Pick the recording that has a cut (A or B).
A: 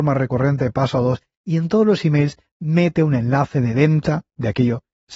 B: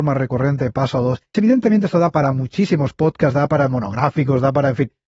B